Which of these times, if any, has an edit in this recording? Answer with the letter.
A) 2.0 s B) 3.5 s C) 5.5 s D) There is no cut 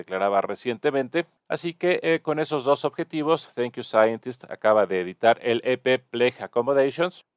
D